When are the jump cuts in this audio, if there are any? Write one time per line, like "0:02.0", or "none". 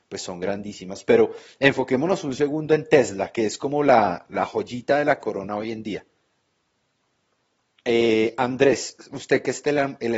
none

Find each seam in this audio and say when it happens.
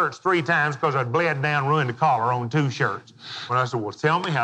0:03.5

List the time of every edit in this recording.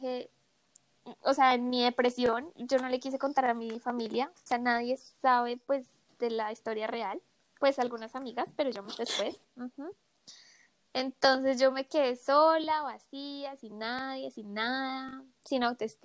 0:09.4

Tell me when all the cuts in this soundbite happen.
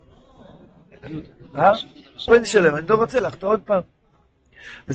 0:02.3

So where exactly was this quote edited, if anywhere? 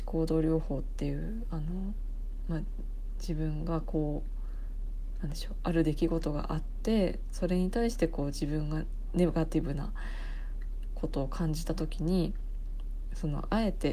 none

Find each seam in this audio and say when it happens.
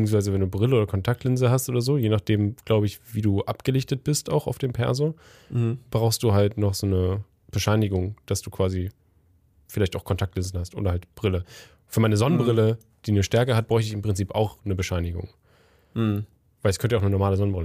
none

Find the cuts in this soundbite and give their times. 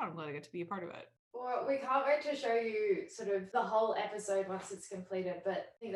none

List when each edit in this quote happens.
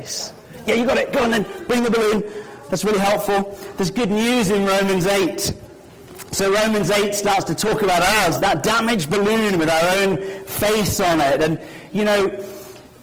0:08.4

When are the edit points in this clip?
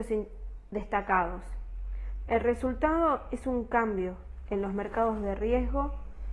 0:02.3

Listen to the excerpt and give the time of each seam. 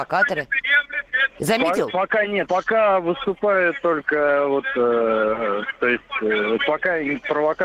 0:02.5
0:05.8

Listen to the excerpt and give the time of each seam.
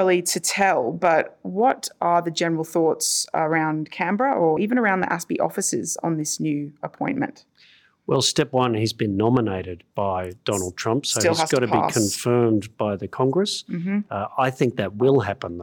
none

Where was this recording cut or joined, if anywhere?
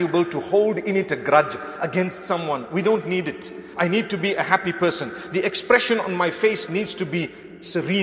none

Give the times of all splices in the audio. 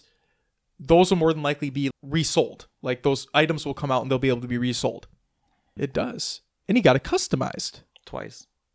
0:01.9
0:05.8

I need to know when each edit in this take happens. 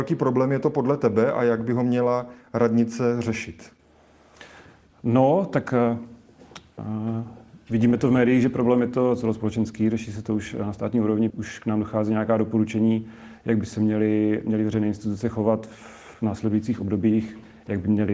0:11.3
0:16.1

